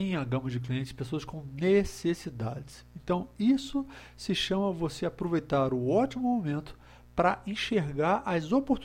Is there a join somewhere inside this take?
no; 0 cuts

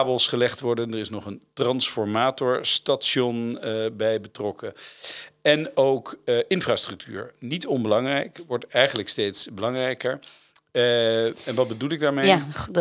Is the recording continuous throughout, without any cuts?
yes; 0 cuts

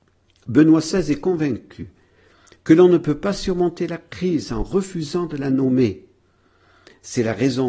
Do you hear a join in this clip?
no; 0 cuts

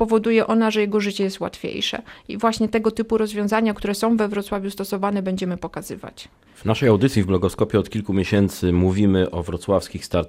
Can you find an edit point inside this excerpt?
yes; 1 cut; at 6.5 s

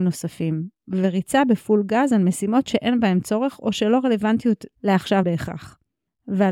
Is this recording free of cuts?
yes; 0 cuts

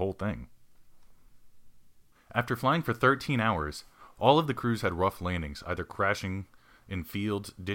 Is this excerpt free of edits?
no; 1 cut; at 2.1 s

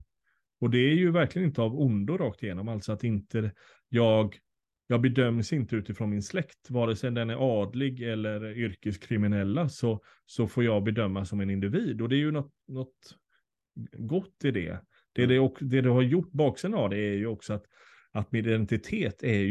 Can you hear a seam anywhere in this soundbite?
no; 0 cuts

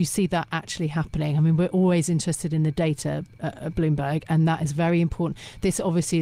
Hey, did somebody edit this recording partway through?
no; 0 cuts

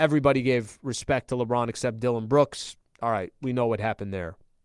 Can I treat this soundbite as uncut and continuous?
yes; 0 cuts

